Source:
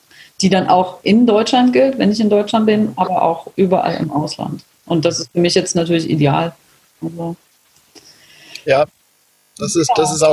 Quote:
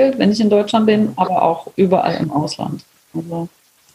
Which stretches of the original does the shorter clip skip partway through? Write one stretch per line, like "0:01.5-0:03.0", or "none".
0:04.8-0:06.8

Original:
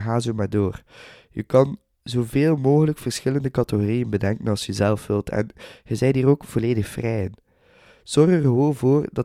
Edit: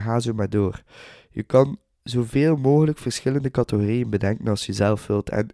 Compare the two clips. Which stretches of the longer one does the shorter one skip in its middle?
none

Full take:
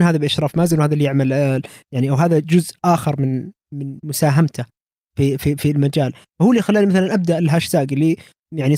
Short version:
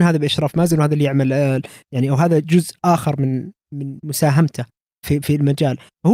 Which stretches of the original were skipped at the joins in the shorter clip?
0:05.0-0:05.4

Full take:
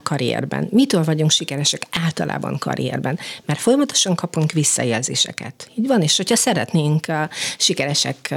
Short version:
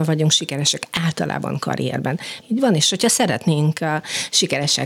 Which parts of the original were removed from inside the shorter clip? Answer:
0:03.4-0:05.7

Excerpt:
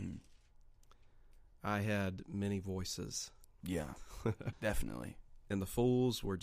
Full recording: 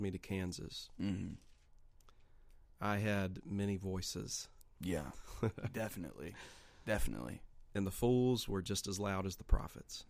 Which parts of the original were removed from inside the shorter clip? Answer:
0:05.7-0:06.8

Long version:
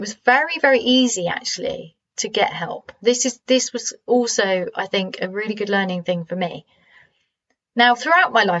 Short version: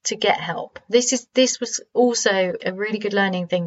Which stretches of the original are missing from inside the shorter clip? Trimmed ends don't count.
0:04.7-0:05.2

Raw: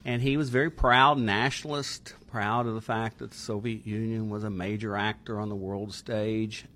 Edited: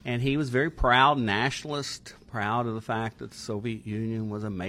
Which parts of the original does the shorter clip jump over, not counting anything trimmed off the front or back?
none

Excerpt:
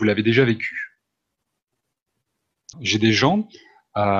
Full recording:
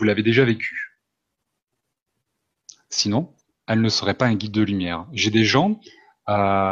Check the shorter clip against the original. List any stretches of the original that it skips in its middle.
0:02.7-0:05.1

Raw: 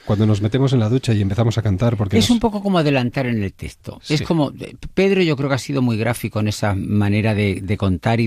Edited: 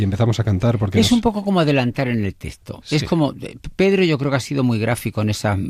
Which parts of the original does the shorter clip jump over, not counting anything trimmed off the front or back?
none

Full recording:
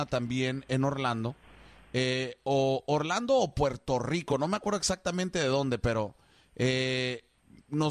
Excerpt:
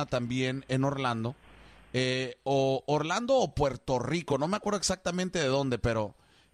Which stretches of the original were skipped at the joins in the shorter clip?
none

